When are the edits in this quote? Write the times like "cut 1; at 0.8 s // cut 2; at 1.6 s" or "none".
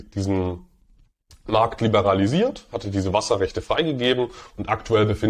none